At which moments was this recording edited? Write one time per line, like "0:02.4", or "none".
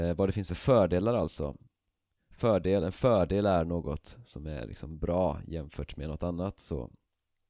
none